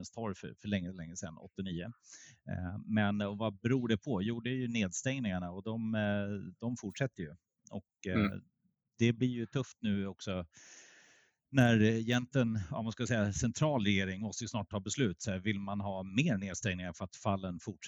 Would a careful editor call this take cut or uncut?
uncut